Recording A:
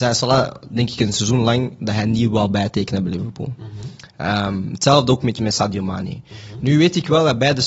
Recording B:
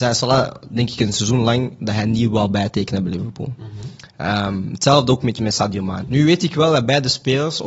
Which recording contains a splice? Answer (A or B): B